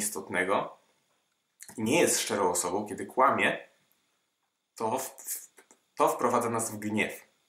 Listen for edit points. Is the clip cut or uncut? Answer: uncut